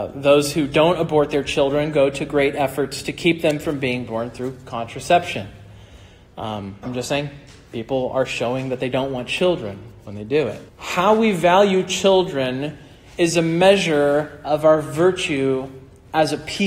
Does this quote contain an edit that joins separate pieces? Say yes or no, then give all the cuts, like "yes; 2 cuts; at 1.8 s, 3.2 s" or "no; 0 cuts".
yes; 2 cuts; at 6.8 s, 10.7 s